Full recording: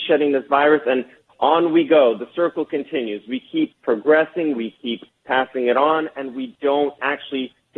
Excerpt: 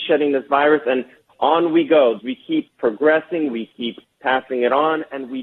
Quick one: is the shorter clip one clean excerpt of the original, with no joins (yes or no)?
no